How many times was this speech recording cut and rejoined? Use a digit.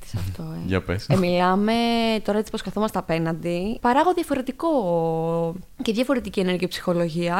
2